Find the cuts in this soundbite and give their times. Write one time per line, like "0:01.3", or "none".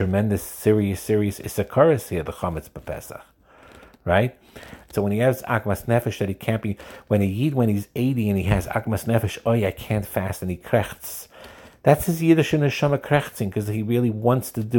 0:04.9